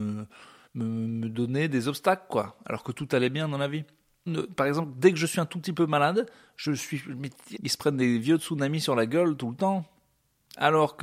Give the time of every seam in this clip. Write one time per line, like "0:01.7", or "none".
0:04.3
0:07.6